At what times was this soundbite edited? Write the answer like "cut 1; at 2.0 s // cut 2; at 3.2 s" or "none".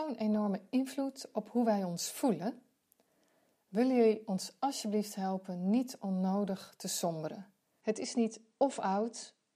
cut 1; at 7.8 s